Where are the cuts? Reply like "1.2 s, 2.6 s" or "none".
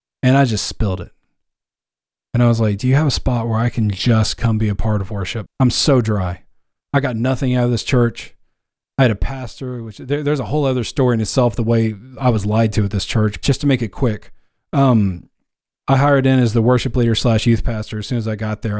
5.5 s, 13.4 s

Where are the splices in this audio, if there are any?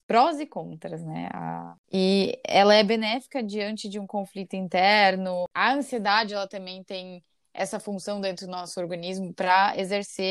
none

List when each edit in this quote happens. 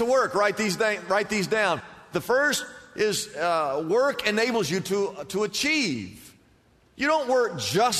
none

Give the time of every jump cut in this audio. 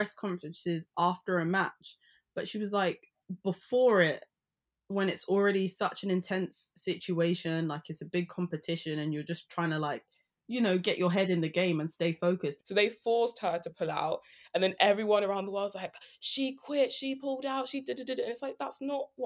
12.6 s

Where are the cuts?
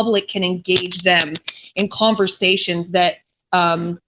none

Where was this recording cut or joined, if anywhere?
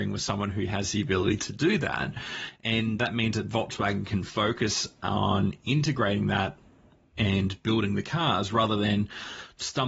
3.0 s

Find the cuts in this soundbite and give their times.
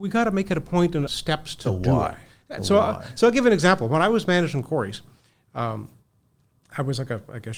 1.1 s

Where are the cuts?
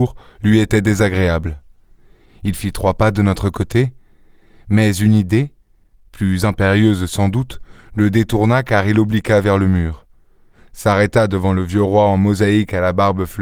none

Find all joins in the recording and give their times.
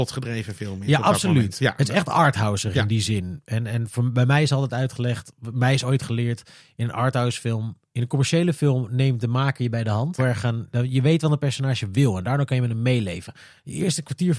10.2 s

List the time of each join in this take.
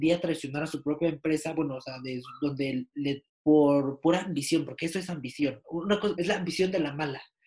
3.3 s, 6.1 s

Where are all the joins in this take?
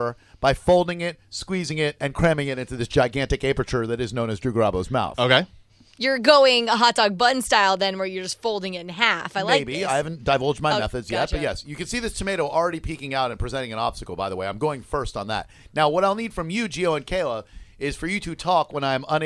none

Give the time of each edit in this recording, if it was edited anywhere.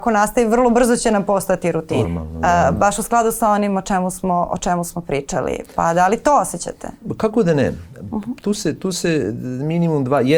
2.0 s

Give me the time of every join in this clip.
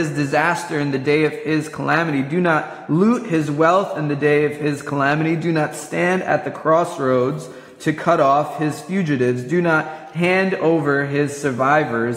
none

